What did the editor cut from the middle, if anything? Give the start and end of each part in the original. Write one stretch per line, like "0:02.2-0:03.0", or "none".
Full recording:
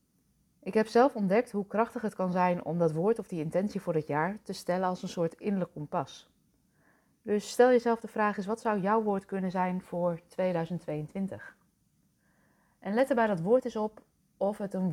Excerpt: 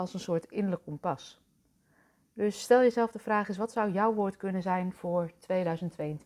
none